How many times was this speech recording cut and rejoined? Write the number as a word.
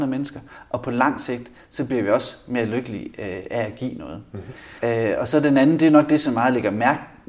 one